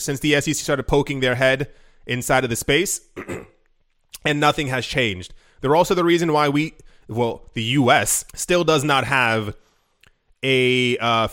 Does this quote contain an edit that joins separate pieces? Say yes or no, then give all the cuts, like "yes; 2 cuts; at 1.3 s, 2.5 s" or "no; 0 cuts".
yes; 1 cut; at 8.3 s